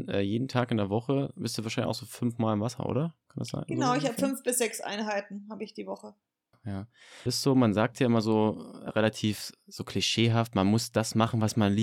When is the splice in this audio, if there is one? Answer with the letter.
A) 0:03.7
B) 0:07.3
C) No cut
B